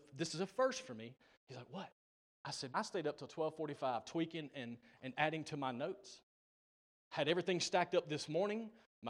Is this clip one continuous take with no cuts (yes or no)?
no